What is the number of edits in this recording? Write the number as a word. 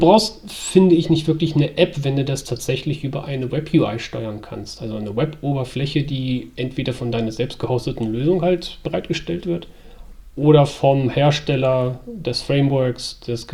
zero